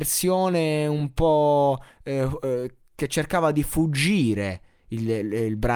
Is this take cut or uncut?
uncut